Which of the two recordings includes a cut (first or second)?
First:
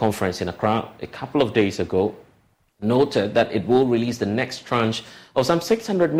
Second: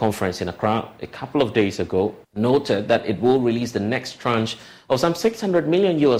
second